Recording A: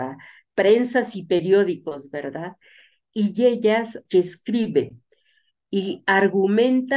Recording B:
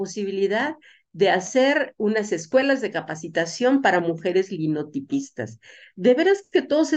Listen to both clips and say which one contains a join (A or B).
A